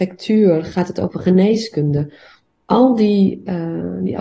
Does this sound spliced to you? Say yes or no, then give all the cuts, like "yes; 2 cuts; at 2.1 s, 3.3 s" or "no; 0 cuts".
no; 0 cuts